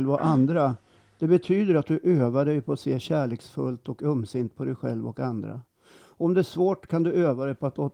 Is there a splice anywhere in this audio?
no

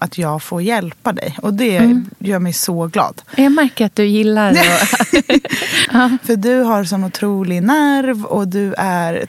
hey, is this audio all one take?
no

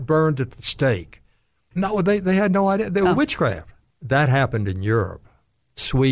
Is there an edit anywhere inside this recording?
yes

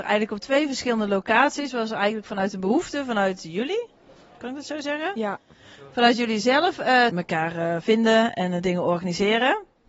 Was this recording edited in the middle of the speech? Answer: yes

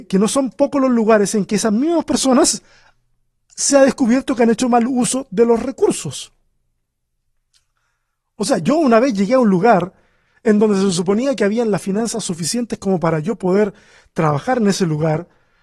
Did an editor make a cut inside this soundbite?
no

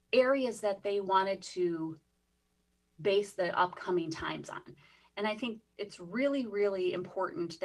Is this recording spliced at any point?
no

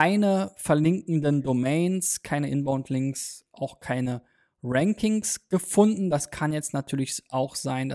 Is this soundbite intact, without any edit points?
yes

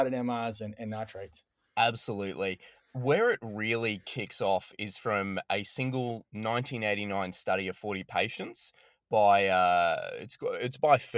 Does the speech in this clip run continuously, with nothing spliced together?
yes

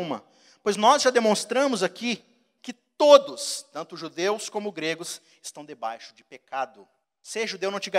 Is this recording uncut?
no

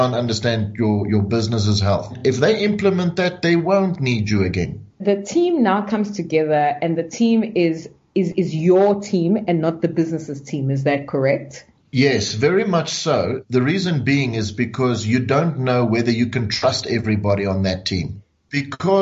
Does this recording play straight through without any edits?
yes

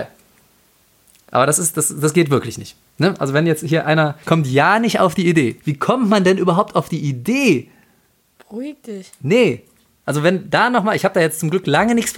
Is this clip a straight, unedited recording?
no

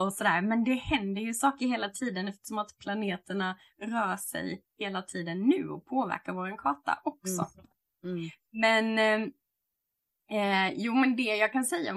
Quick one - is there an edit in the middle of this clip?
no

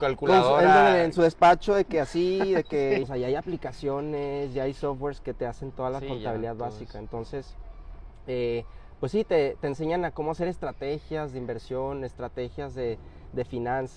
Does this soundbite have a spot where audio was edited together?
yes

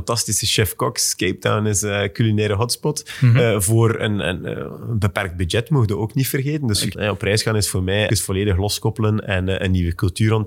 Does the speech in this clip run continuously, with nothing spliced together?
no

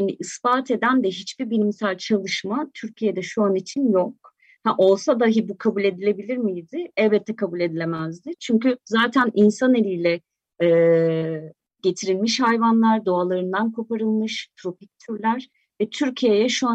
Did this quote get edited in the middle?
no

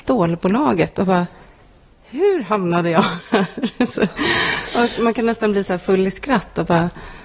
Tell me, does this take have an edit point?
no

